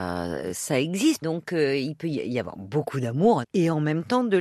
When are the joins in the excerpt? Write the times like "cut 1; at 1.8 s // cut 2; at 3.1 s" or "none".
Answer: cut 1; at 1.2 s // cut 2; at 3.4 s